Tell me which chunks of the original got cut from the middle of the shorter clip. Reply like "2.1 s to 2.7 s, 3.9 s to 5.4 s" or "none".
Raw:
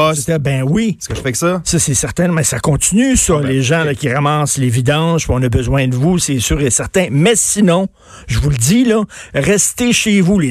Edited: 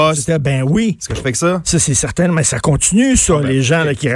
none